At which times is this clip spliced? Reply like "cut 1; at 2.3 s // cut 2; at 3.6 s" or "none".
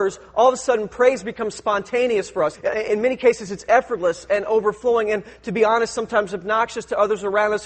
cut 1; at 2.5 s